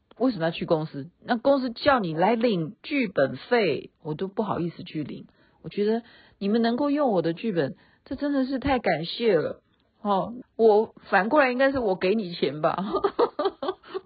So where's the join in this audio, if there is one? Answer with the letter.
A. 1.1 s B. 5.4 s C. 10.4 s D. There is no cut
C